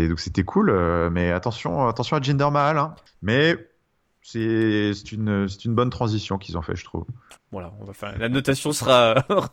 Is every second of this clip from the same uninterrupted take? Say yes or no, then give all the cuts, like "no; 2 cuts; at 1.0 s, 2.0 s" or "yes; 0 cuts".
no; 2 cuts; at 3.1 s, 7.4 s